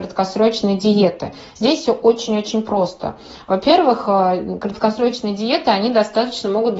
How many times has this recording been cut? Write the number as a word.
zero